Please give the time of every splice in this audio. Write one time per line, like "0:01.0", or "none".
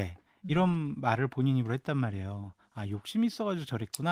none